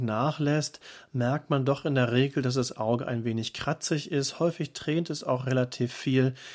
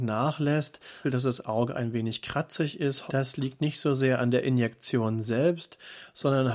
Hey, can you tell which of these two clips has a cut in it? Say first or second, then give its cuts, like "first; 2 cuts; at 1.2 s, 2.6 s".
second; 2 cuts; at 1.0 s, 3.1 s